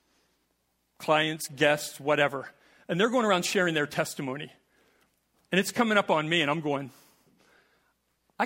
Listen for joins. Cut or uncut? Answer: uncut